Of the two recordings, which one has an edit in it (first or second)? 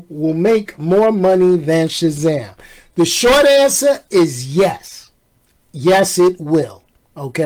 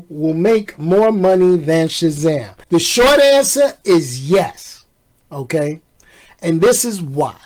second